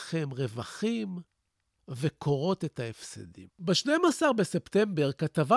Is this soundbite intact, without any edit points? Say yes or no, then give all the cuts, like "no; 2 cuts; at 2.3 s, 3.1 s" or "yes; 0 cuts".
no; 1 cut; at 3.5 s